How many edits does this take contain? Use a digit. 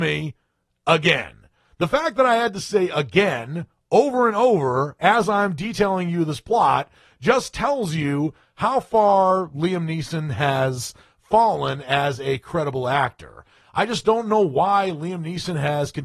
1